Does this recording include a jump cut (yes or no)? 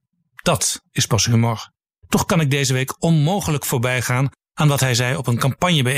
yes